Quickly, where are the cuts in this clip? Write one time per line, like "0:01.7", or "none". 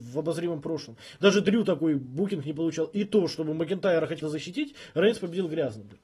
0:04.2